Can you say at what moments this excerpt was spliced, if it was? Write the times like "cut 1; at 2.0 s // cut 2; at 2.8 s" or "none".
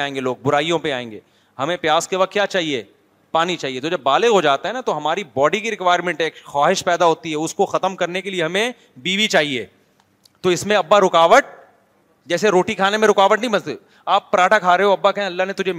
none